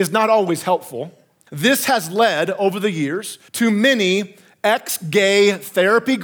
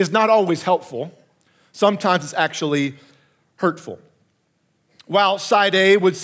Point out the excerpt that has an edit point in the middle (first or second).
first